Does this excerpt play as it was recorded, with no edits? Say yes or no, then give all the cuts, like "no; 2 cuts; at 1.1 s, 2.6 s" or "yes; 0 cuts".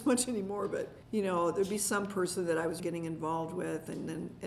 no; 2 cuts; at 1.0 s, 2.8 s